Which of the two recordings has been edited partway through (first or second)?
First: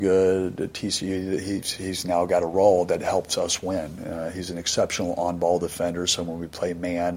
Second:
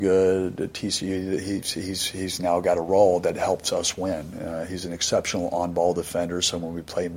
first